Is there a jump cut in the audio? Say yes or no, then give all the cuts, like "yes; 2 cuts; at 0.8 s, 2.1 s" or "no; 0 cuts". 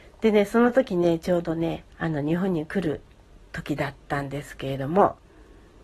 yes; 1 cut; at 1.9 s